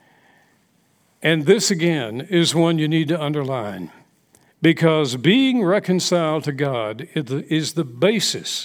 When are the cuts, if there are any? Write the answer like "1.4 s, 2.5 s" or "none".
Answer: none

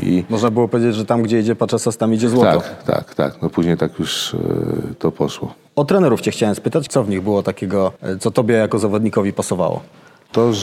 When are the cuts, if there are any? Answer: 6.9 s, 8.0 s

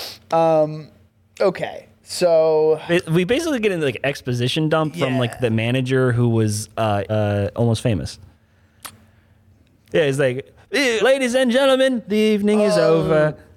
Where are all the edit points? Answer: 7.1 s, 11.0 s

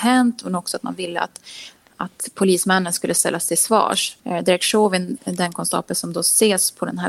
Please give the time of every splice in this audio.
none

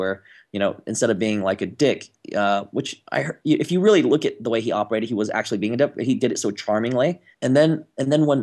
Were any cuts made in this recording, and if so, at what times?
7.3 s

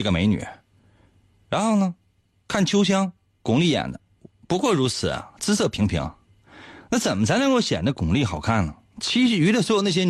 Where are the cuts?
none

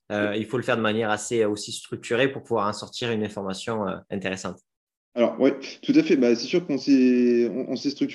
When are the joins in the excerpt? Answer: none

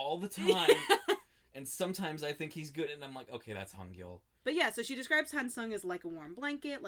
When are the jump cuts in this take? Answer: 2.9 s, 4.4 s

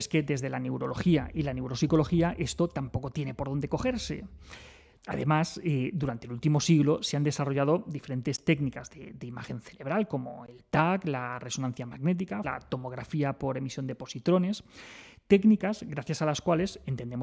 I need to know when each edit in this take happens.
5.0 s, 12.4 s

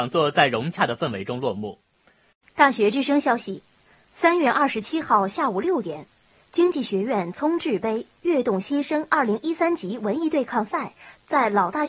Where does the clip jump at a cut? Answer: 2.3 s

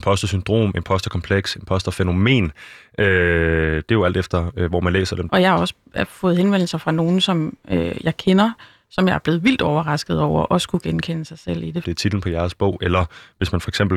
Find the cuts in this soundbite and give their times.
5.3 s, 11.8 s

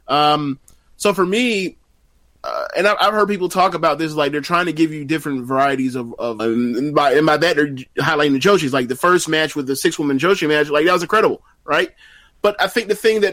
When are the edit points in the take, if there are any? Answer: 6.4 s

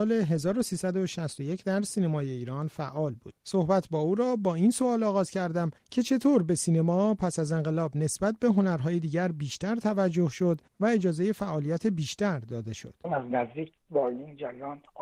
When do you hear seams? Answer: 3.4 s

